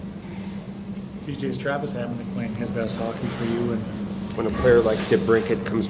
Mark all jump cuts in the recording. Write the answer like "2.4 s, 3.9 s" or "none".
4.4 s